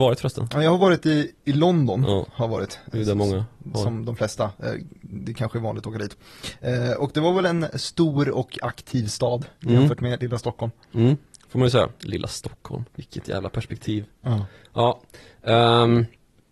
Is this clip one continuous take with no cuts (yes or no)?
no